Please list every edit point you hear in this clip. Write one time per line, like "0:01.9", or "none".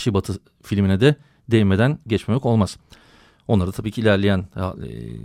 none